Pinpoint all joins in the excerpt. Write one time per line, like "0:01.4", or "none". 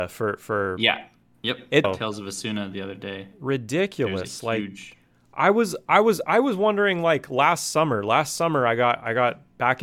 0:01.8